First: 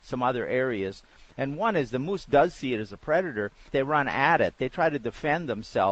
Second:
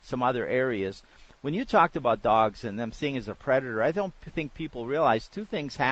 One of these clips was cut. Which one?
first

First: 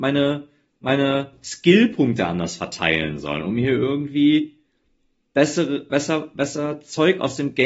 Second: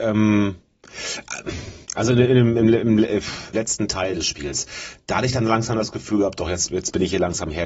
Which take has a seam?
second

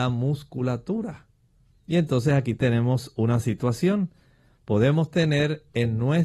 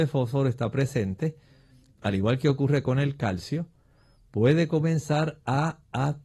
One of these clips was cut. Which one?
second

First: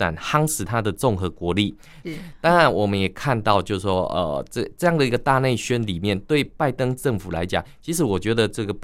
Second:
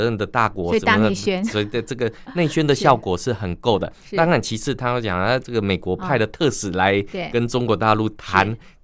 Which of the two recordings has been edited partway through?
first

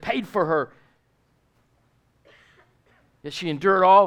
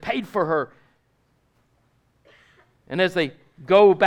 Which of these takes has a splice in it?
second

